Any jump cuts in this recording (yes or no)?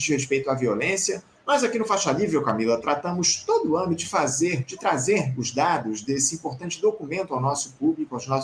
yes